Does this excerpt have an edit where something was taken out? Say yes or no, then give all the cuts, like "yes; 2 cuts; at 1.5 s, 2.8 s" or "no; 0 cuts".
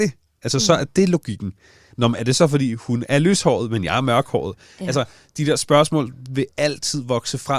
yes; 1 cut; at 1.9 s